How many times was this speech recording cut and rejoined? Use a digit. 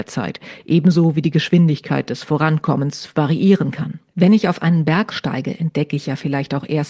1